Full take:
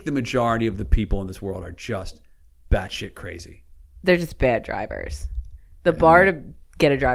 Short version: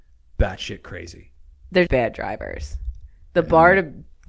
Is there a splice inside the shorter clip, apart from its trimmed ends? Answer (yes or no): yes